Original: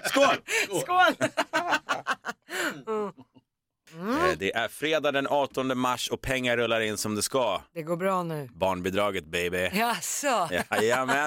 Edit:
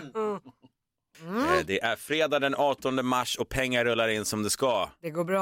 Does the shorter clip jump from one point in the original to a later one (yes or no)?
no